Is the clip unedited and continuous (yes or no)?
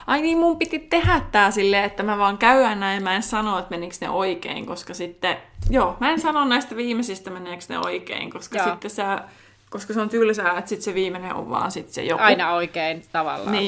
yes